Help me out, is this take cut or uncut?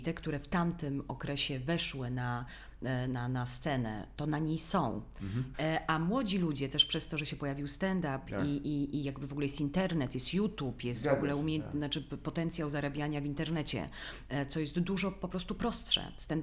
cut